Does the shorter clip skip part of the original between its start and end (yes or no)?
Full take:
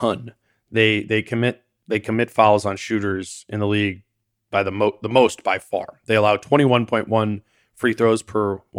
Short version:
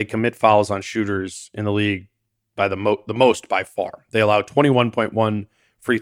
no